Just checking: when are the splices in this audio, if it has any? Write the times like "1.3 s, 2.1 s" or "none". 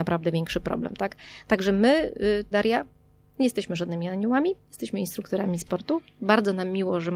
2.5 s